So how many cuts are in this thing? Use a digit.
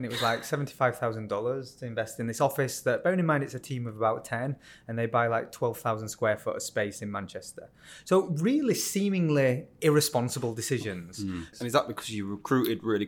1